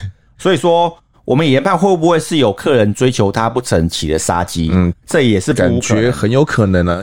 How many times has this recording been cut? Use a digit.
0